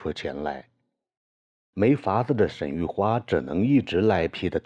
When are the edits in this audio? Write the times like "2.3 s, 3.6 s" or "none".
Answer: none